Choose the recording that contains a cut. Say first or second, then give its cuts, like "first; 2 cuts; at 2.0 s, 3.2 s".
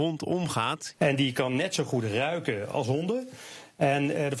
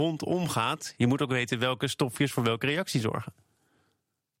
first; 2 cuts; at 0.9 s, 2.7 s